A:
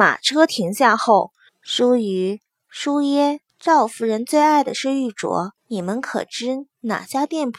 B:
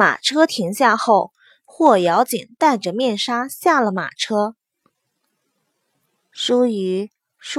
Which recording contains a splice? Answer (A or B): A